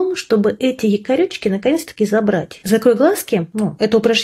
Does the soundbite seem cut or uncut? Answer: uncut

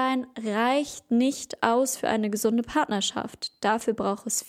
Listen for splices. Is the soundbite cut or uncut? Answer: uncut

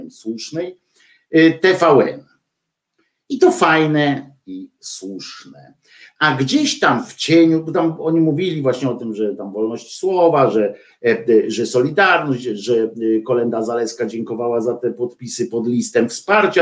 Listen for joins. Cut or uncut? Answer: uncut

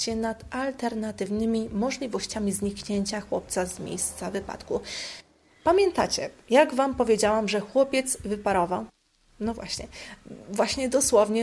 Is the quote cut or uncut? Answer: uncut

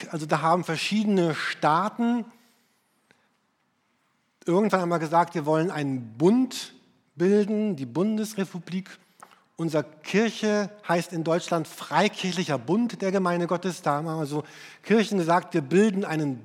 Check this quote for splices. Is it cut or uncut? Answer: uncut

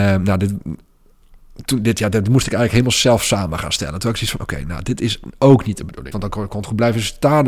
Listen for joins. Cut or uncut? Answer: cut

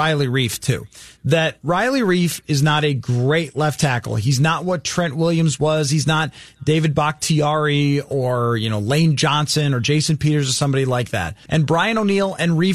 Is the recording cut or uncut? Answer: cut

